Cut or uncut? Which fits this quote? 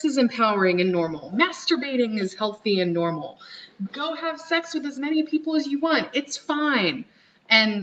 uncut